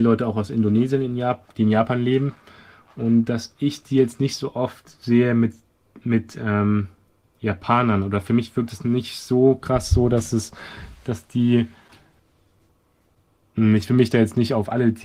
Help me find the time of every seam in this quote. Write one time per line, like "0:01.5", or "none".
none